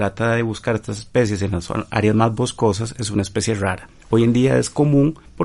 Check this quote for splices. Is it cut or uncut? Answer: uncut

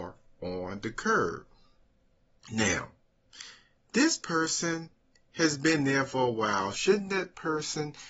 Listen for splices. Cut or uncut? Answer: cut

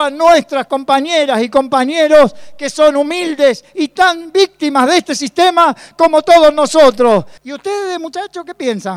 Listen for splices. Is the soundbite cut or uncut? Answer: cut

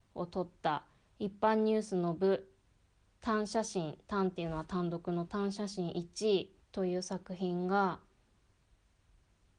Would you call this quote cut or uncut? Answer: cut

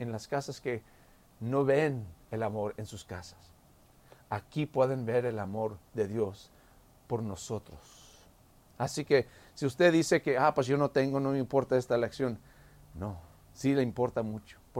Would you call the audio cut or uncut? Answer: uncut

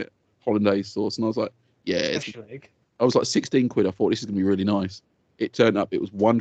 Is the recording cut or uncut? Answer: uncut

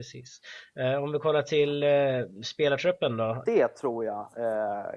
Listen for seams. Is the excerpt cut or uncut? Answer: cut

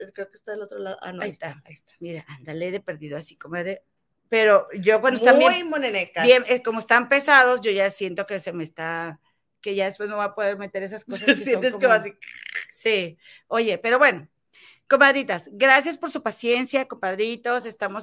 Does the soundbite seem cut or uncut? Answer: uncut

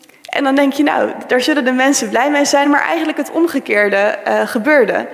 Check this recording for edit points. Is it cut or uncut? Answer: uncut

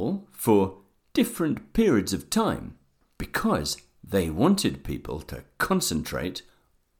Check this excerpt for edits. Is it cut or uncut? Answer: uncut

